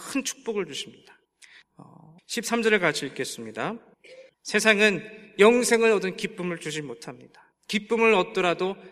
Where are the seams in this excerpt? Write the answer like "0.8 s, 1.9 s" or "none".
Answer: 2.2 s, 4.3 s